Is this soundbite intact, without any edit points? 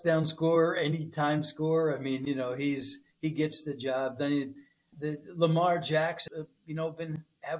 no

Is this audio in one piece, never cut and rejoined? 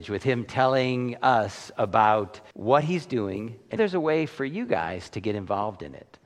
no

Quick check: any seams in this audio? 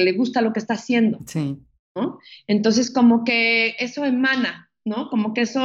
no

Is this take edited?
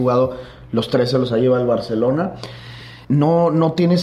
yes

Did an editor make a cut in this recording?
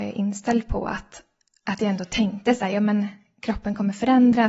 no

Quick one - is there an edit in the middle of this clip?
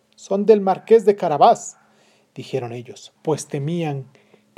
no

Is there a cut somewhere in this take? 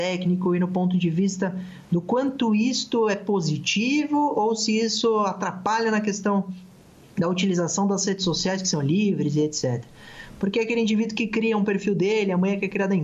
no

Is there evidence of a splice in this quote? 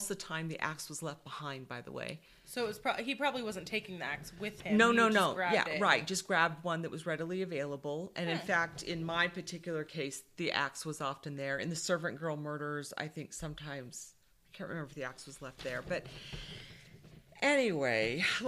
no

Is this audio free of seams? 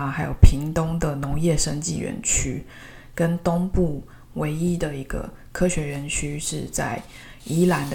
yes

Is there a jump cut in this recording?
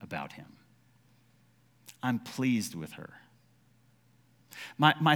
no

